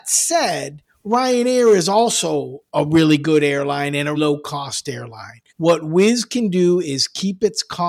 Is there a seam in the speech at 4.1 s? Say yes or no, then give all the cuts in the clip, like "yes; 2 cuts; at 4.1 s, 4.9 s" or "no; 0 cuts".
yes; 2 cuts; at 4.1 s, 5.5 s